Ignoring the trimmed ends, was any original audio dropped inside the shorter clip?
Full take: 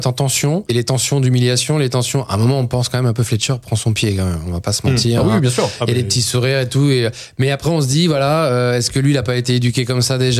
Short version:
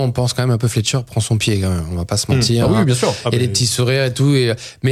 no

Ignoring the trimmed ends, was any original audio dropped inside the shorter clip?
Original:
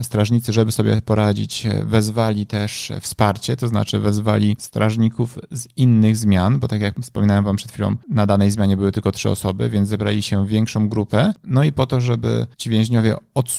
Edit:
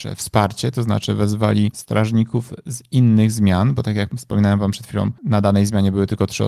no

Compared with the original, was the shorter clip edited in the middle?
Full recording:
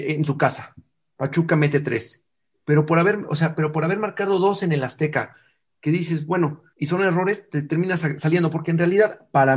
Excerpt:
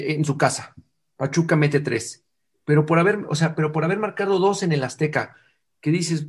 no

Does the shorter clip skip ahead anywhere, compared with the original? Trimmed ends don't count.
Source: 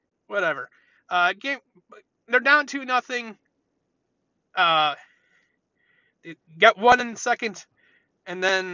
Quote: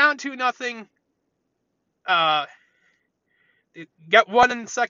no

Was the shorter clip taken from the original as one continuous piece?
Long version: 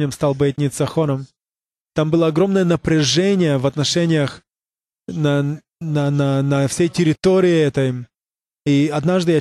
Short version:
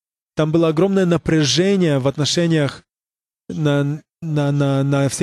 yes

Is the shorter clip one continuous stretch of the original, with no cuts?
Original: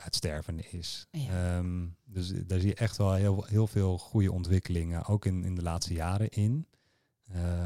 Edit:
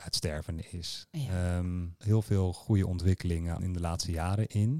no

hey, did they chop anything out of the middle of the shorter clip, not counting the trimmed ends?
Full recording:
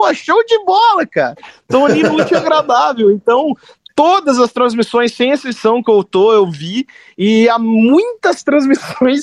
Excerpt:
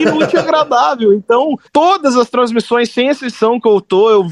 yes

